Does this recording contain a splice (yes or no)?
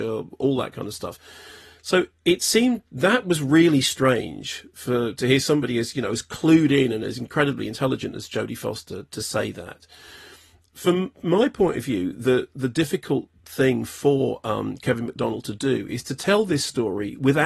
no